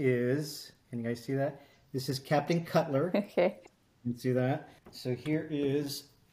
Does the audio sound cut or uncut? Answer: cut